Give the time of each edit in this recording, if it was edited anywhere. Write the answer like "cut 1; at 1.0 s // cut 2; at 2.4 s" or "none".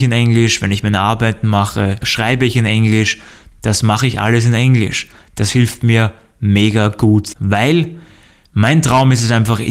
cut 1; at 7.3 s